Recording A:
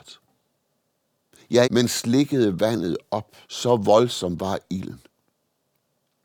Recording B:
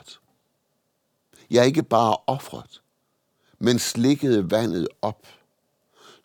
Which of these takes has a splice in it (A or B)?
A